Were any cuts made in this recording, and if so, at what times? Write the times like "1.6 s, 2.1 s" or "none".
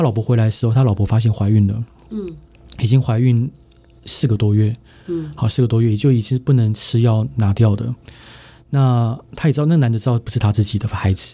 none